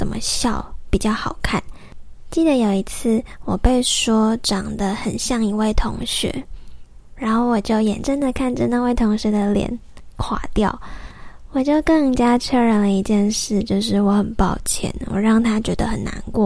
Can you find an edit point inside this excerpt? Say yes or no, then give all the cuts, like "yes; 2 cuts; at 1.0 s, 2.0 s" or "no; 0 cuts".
yes; 1 cut; at 8.0 s